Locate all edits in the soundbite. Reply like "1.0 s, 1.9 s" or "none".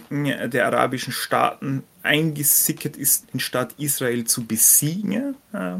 3.2 s

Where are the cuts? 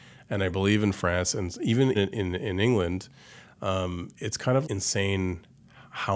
1.9 s, 4.6 s

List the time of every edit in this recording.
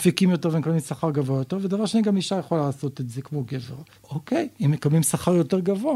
4.0 s

